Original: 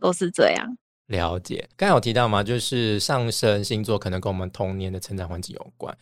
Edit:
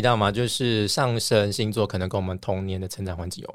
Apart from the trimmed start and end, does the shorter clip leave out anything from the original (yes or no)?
no